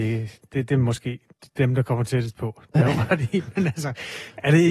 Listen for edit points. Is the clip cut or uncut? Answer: uncut